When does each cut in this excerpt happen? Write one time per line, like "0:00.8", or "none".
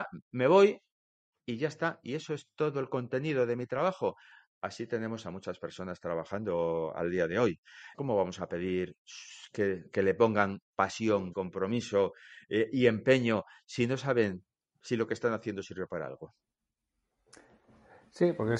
0:07.9
0:11.3

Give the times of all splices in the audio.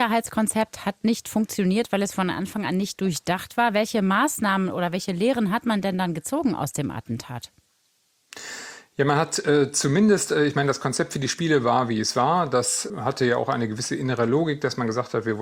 none

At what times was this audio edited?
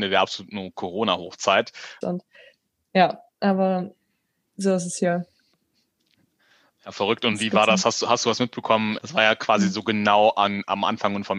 0:02.0
0:09.0

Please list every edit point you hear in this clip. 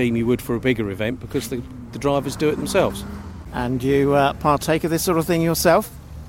none

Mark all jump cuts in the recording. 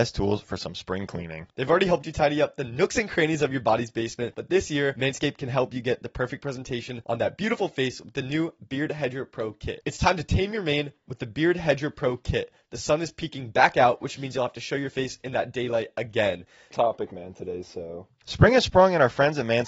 0:09.8
0:16.7

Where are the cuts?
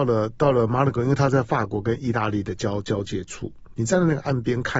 0:03.7

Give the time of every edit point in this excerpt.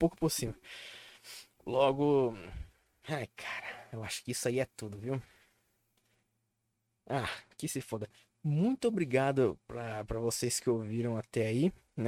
none

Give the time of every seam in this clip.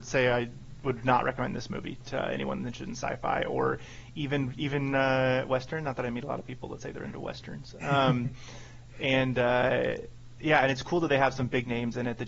none

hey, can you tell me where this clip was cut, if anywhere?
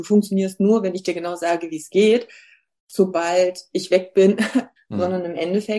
0:04.8

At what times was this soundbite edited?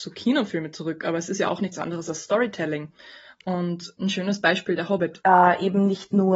0:05.2

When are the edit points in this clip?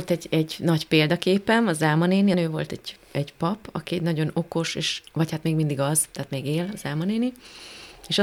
0:02.3
0:05.1

